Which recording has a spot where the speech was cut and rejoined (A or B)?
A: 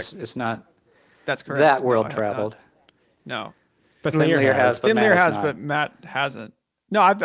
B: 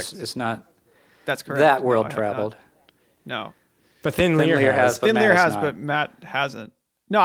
A